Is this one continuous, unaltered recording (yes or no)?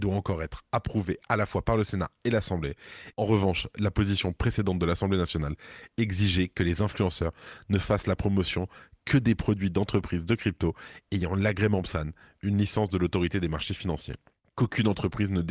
no